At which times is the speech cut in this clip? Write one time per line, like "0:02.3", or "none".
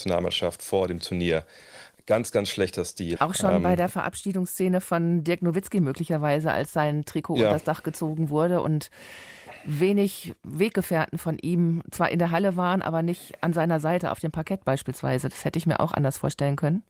0:03.2